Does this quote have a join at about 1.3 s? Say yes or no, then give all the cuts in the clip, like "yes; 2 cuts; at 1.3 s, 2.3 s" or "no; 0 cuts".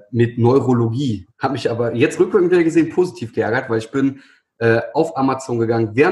yes; 1 cut; at 1.3 s